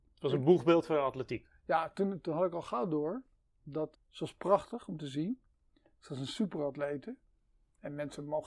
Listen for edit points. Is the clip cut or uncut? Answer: cut